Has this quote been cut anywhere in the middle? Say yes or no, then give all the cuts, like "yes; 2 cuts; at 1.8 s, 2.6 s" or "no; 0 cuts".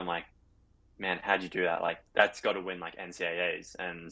yes; 1 cut; at 2.1 s